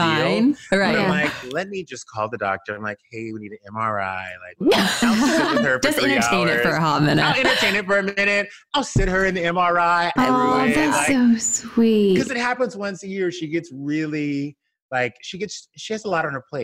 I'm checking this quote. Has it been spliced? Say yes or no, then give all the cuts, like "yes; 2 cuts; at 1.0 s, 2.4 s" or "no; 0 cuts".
yes; 1 cut; at 10.2 s